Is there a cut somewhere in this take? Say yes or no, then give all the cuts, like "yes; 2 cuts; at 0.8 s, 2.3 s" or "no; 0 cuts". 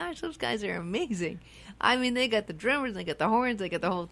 no; 0 cuts